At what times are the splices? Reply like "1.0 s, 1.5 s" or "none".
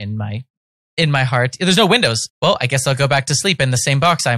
2.3 s